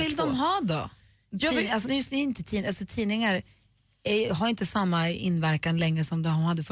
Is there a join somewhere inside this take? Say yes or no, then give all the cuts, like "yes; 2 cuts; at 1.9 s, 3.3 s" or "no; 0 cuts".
yes; 1 cut; at 1.8 s